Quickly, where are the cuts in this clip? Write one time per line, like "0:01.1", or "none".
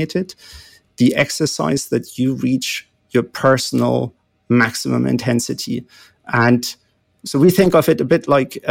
none